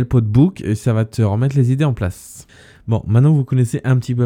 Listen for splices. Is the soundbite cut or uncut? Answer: uncut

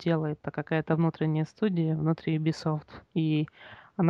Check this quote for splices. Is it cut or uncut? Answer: uncut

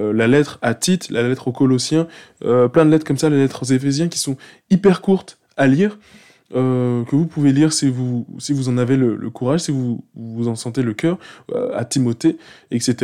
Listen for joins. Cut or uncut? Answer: uncut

